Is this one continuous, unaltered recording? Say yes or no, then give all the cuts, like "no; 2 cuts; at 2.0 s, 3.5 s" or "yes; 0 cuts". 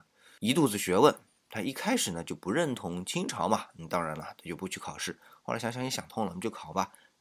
yes; 0 cuts